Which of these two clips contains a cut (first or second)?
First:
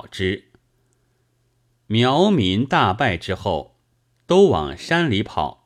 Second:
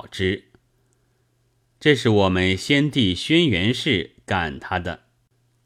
second